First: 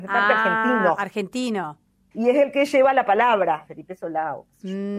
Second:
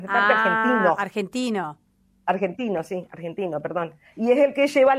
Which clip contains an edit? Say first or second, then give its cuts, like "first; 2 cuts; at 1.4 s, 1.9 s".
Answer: first; 2 cuts; at 2.1 s, 3.7 s